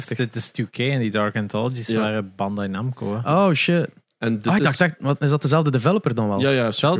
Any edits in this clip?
no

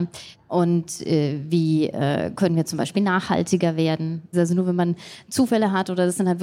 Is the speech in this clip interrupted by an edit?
yes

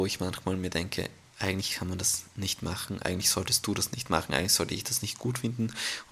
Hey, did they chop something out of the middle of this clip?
yes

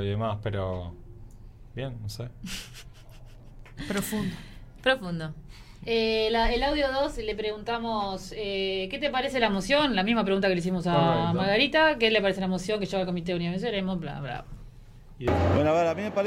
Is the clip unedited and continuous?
yes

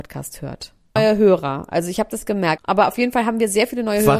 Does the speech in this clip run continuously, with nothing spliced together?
no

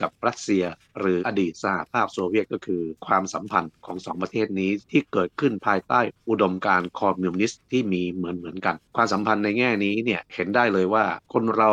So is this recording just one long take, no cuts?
no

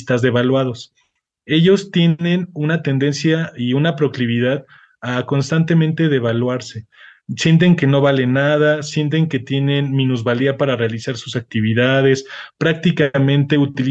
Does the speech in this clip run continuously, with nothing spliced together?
yes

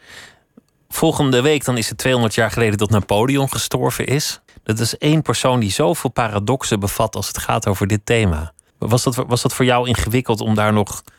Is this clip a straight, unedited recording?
no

